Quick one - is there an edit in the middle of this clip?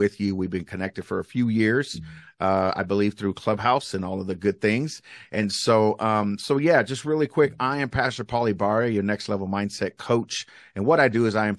no; 0 cuts

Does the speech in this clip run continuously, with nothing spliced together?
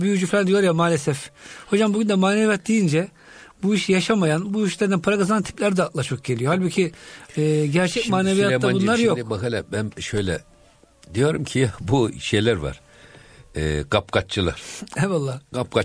yes; 0 cuts

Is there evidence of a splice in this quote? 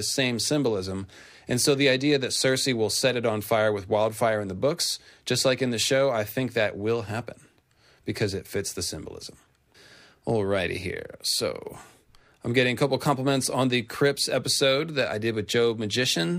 no; 0 cuts

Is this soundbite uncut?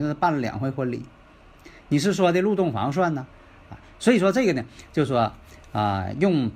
yes; 0 cuts

